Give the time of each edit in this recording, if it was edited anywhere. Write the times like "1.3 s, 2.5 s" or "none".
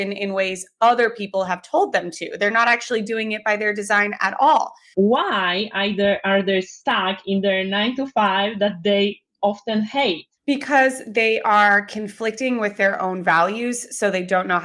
4.9 s, 10.4 s